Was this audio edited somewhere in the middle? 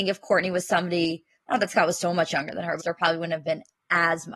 yes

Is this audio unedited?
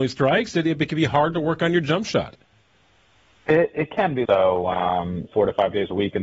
no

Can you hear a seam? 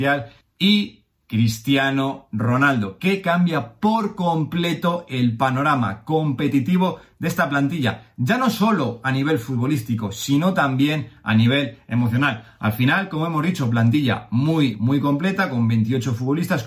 yes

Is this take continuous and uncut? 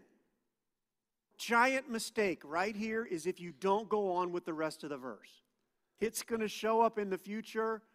no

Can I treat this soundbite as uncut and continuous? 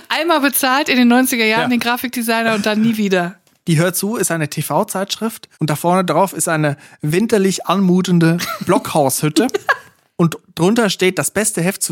no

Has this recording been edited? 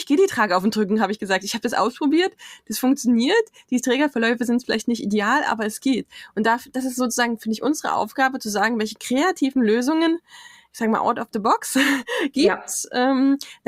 no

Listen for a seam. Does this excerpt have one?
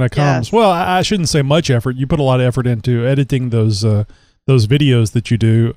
no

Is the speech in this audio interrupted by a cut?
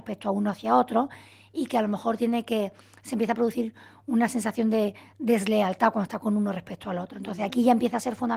no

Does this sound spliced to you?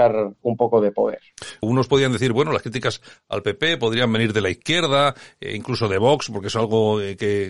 yes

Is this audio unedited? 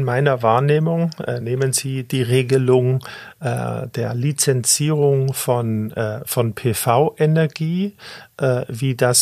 yes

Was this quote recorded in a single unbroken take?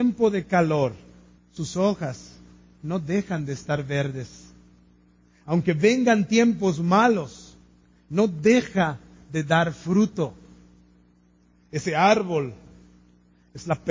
no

